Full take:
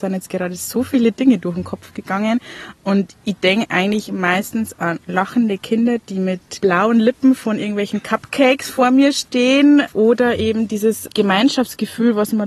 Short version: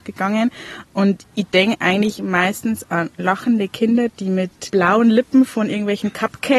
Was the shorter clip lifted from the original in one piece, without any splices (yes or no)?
yes